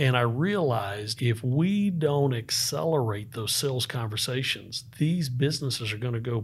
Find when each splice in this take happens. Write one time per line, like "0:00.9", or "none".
0:01.2

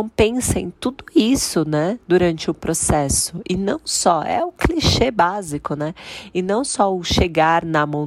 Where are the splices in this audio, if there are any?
none

